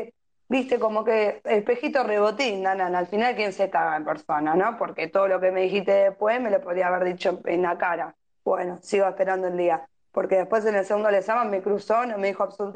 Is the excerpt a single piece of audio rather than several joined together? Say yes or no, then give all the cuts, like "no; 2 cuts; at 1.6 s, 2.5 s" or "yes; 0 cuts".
yes; 0 cuts